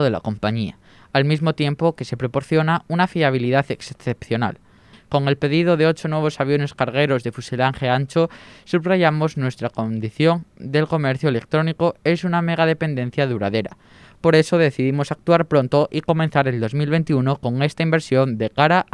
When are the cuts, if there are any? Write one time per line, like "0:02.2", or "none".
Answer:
0:04.9